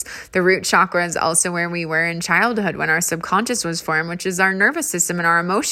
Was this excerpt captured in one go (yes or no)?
yes